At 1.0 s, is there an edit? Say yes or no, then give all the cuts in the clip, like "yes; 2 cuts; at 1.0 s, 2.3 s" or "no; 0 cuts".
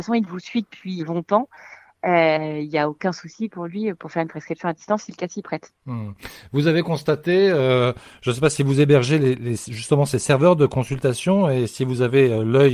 yes; 1 cut; at 1.0 s